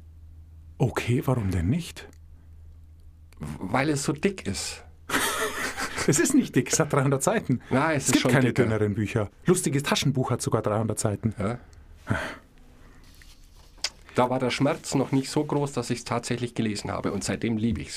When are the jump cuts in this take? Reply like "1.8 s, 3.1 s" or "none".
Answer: 9.3 s, 14.0 s